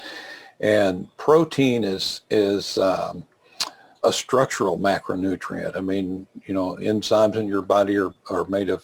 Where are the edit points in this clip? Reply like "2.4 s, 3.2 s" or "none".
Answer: 4.0 s